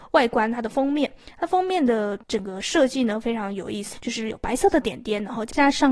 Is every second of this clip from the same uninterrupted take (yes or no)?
no